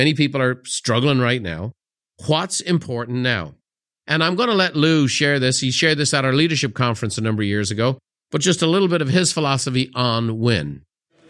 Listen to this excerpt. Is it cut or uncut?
uncut